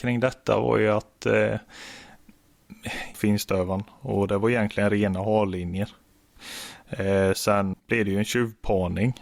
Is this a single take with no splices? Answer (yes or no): no